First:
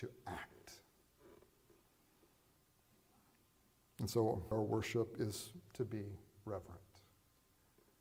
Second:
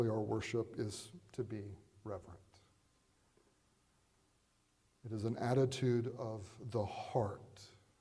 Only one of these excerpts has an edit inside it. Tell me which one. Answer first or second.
first